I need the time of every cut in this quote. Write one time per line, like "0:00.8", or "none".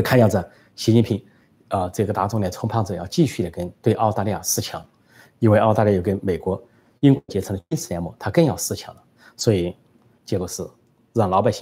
0:10.2